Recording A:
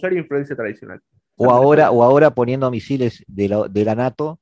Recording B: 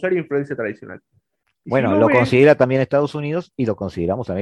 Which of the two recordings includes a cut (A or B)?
A